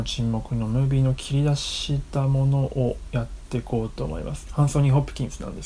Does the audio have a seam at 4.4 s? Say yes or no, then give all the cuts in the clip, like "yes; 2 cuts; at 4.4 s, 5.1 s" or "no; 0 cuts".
yes; 1 cut; at 4.4 s